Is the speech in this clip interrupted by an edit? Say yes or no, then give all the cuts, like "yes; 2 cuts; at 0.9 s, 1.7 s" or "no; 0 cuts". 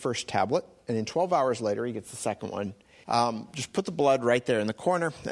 yes; 1 cut; at 3.0 s